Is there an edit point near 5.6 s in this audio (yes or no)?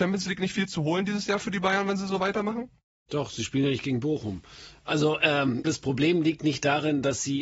yes